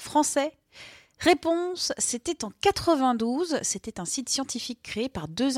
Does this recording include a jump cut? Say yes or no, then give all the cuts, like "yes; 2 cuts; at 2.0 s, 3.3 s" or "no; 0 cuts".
no; 0 cuts